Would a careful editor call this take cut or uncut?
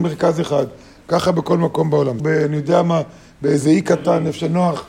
cut